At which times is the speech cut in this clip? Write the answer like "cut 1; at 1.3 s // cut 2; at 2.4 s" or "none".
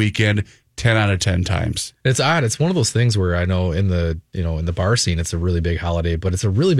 none